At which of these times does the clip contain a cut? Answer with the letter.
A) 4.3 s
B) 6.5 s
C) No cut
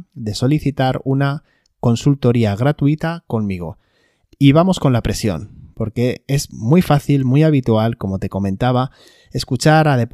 A